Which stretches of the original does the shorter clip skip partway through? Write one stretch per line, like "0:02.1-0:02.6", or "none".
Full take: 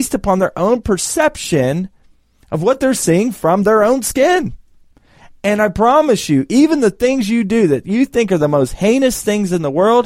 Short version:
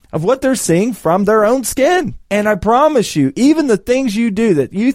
0:04.6-0:05.4

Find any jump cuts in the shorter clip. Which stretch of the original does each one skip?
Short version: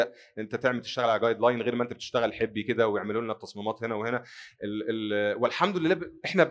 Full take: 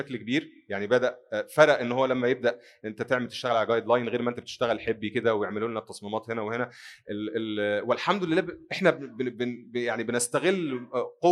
none

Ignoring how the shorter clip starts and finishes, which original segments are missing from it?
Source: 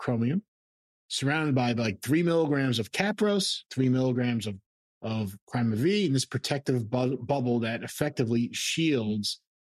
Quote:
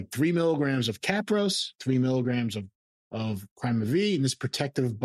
none

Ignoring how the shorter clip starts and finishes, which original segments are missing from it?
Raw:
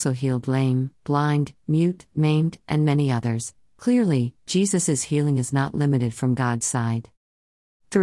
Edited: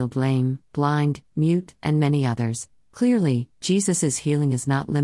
0:02.1-0:02.6

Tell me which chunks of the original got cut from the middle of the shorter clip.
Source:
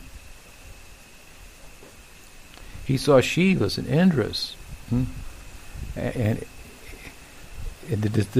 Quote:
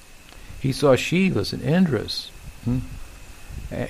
none

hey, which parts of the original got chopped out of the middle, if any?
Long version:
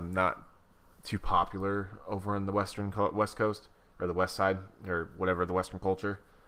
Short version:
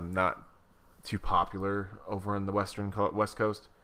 none

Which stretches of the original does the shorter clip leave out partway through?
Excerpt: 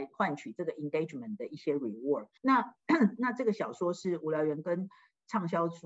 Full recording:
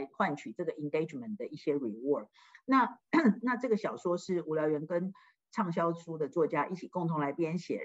0:02.4-0:02.6

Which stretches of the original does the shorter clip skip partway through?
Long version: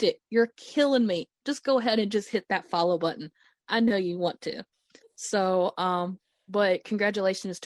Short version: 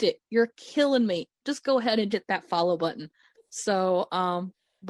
0:02.1-0:02.3
0:03.6-0:05.0

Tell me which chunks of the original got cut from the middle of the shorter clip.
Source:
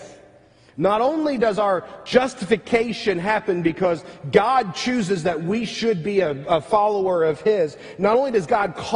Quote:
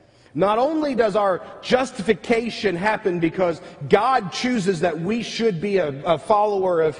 none

